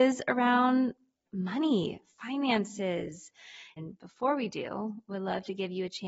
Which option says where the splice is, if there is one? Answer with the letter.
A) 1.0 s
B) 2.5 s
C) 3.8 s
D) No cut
C